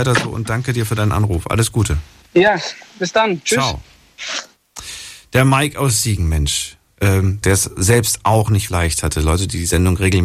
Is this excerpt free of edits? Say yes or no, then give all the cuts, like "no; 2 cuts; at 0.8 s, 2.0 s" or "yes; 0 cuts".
no; 2 cuts; at 7.4 s, 8.7 s